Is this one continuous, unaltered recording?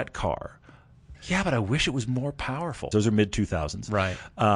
no; 2 cuts; at 1.1 s, 2.9 s

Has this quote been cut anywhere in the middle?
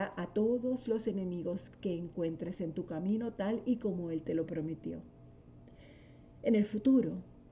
no; 0 cuts

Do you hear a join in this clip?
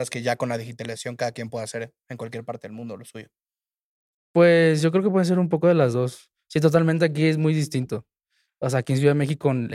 no; 0 cuts

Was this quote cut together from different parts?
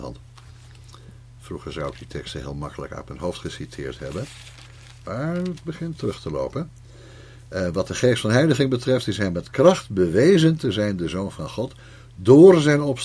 no; 0 cuts

